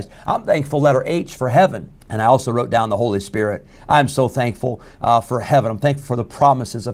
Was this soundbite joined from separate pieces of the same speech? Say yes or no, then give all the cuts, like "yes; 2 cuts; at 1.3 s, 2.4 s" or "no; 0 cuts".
yes; 1 cut; at 2.0 s